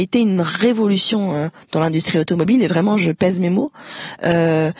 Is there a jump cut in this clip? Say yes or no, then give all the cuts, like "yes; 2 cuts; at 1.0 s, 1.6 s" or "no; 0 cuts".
no; 0 cuts